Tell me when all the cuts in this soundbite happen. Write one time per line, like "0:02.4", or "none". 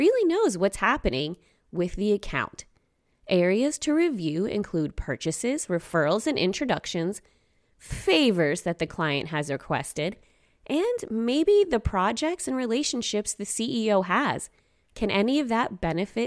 none

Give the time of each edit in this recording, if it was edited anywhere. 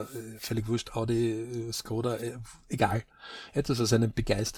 none

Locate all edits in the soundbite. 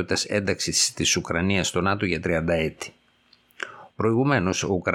0:03.9

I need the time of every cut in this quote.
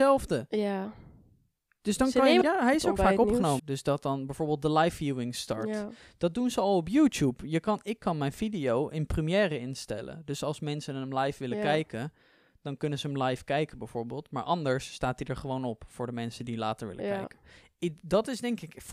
0:02.4
0:03.6

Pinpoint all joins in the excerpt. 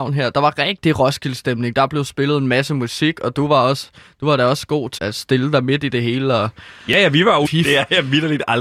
0:05.0
0:07.4

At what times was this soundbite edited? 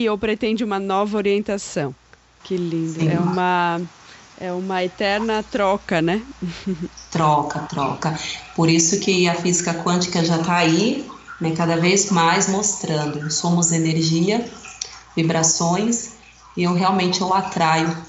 0:02.4

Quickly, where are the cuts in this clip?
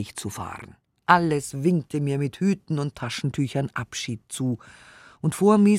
none

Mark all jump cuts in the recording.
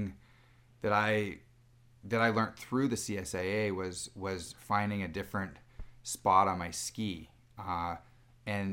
none

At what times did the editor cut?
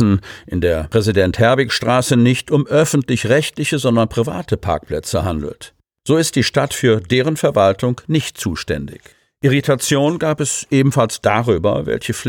none

